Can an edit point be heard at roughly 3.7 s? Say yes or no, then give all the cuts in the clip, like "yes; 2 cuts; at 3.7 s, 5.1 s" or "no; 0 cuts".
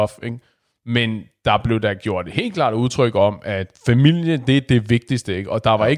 yes; 1 cut; at 3.7 s